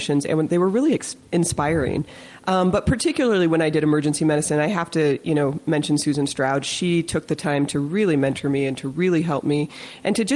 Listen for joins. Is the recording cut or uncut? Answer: uncut